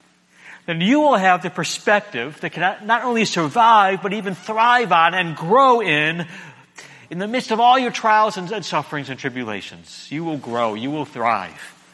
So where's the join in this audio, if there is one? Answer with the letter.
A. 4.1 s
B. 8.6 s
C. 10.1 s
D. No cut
D